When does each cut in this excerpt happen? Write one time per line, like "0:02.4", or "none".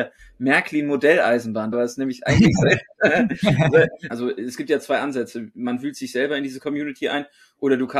0:01.7
0:04.1